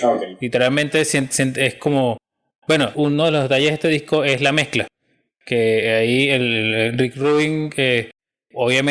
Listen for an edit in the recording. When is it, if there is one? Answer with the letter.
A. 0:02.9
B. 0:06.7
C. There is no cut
A